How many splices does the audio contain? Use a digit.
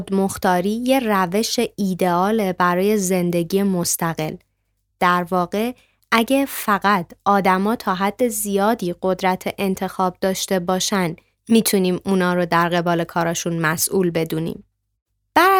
1